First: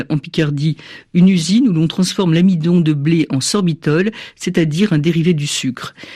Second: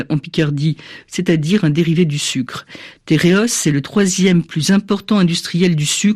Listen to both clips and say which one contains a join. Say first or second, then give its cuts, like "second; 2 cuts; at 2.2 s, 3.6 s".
second; 1 cut; at 1.1 s